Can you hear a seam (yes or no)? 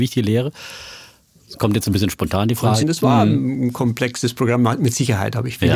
yes